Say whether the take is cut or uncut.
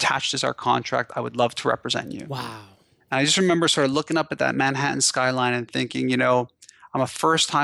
uncut